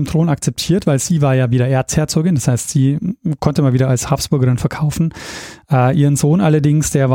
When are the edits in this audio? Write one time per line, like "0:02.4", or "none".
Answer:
none